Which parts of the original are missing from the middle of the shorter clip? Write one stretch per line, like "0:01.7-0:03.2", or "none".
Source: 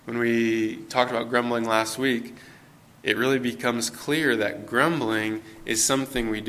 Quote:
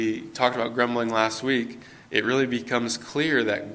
0:02.6-0:03.0